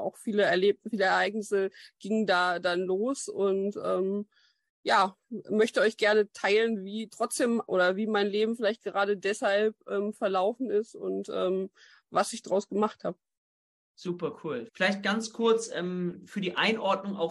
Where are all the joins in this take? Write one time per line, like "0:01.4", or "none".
0:14.7